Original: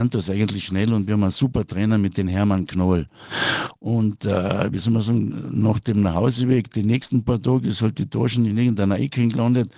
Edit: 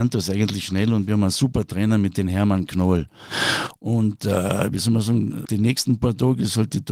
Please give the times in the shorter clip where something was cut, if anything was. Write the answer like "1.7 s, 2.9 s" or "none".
5.4 s